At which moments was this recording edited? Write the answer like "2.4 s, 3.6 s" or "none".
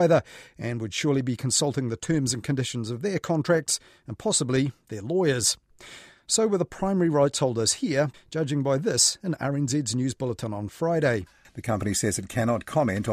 8.1 s, 11.4 s